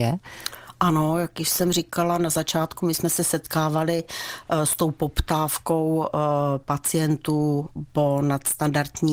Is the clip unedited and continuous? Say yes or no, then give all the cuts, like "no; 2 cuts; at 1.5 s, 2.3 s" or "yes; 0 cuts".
yes; 0 cuts